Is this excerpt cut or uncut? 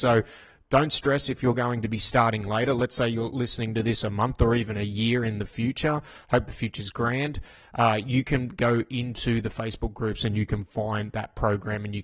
uncut